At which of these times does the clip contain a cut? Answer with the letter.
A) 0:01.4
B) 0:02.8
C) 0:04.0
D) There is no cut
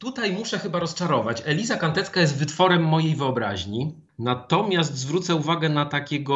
D